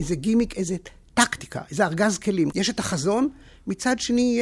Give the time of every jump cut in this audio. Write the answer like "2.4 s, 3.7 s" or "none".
2.5 s

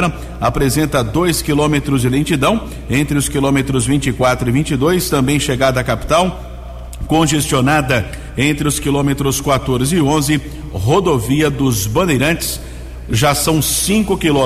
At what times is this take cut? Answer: none

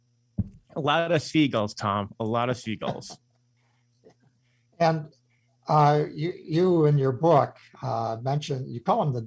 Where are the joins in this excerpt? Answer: 6.4 s

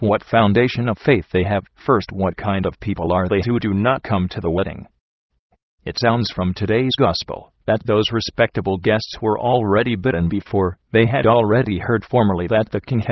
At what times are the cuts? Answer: 1.7 s

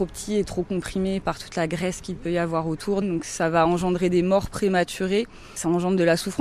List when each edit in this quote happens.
3.0 s

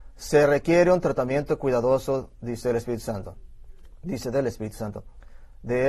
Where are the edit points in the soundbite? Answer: none

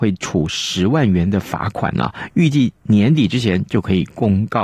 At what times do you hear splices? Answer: none

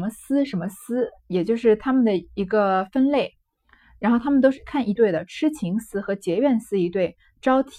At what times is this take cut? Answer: 5.0 s

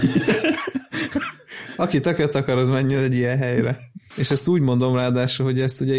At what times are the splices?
4.1 s

